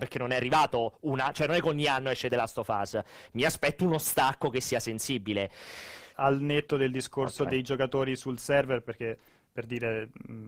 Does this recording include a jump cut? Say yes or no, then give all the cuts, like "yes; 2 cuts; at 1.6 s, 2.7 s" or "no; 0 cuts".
yes; 2 cuts; at 6.1 s, 7.5 s